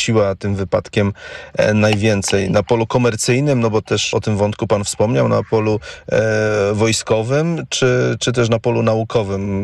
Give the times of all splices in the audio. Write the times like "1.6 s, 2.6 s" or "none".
4.1 s